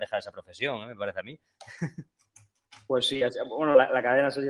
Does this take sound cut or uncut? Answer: uncut